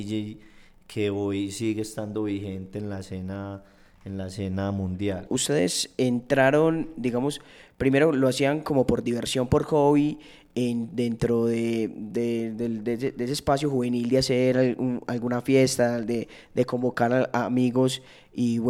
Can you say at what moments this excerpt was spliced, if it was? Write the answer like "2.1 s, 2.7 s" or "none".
5.3 s